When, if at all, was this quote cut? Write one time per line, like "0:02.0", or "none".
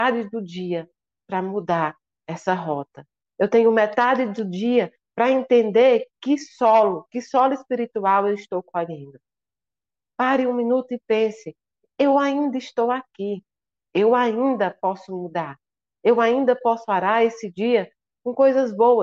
0:10.1